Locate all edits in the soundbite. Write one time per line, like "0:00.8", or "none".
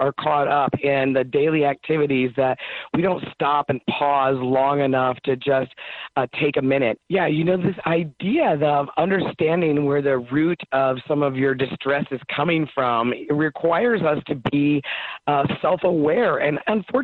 0:07.0